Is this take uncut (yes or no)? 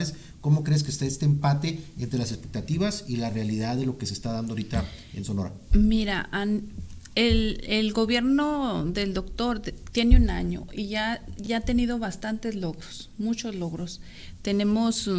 yes